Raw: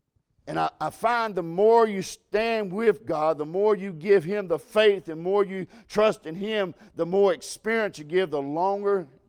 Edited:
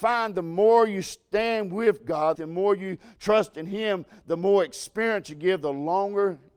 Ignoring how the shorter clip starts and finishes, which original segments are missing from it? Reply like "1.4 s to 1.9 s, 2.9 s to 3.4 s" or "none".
3.4 s to 5.0 s